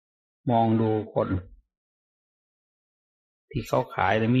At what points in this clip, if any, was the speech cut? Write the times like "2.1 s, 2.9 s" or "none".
none